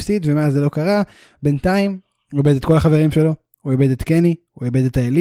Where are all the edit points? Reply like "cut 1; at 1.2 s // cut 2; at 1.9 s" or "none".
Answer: none

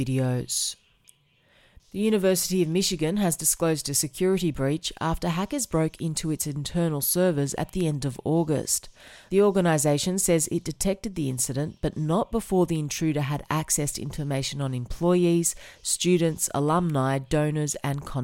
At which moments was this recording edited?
none

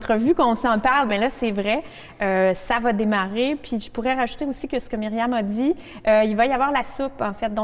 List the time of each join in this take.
none

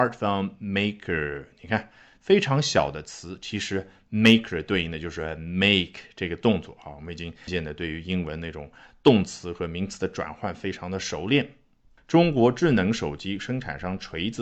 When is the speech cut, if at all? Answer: cut 1; at 7.5 s // cut 2; at 12.0 s

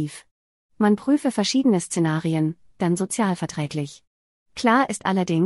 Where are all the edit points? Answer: cut 1; at 2.7 s

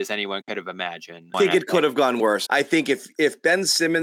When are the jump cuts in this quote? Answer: cut 1; at 1.3 s // cut 2; at 2.5 s

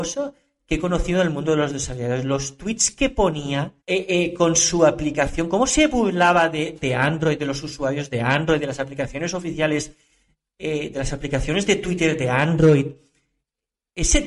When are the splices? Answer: cut 1; at 3.8 s

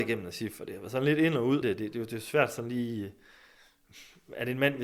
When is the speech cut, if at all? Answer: cut 1; at 1.6 s

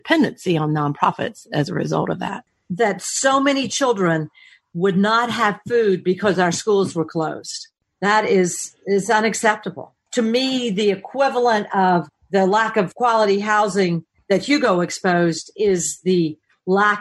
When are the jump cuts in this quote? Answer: none

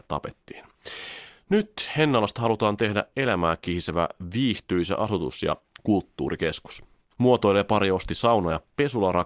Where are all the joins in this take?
cut 1; at 7.2 s

